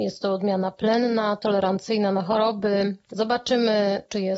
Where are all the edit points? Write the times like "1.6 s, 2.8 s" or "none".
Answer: 3.1 s